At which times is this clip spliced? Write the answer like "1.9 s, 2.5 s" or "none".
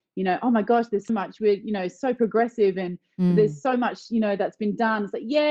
1.1 s